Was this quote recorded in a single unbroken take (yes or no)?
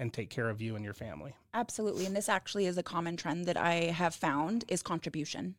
yes